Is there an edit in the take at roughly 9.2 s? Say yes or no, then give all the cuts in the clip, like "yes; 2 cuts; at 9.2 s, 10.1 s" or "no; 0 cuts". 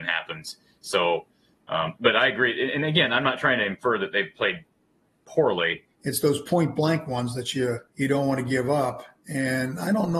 no; 3 cuts; at 1.9 s, 5.9 s, 7.9 s